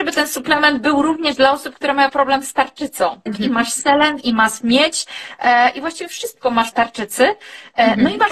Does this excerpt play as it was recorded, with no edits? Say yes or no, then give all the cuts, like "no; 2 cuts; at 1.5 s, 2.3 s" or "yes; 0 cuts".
no; 2 cuts; at 3.3 s, 6.7 s